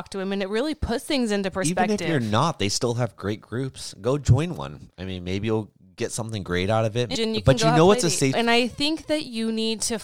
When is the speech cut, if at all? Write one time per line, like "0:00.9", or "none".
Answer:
0:07.1
0:08.3